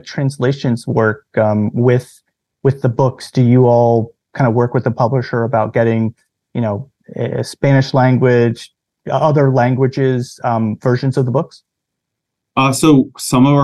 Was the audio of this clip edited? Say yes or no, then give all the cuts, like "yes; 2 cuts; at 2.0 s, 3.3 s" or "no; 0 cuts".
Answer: no; 0 cuts